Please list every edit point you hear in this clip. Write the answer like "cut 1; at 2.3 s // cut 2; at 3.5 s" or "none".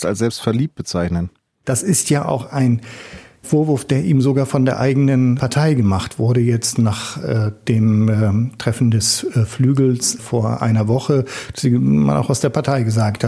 none